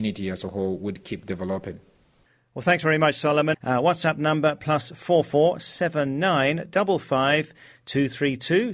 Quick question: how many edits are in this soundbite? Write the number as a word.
one